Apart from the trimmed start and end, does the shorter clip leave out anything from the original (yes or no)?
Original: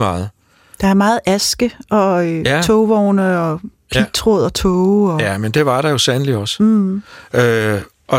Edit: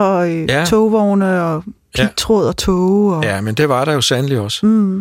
no